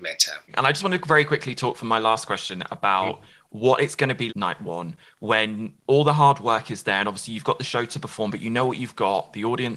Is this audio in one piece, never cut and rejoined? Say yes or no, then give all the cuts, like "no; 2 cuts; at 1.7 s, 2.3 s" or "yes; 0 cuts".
no; 1 cut; at 4.3 s